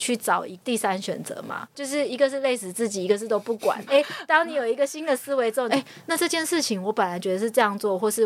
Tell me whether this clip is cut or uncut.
cut